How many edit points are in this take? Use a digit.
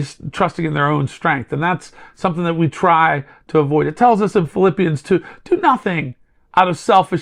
0